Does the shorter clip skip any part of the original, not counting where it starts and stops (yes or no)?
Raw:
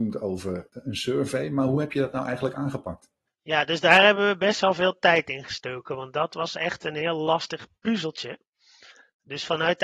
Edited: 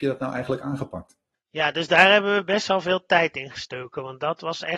no